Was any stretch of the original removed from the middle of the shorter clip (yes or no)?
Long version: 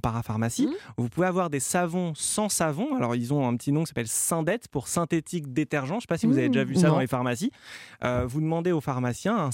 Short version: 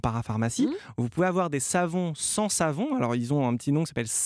no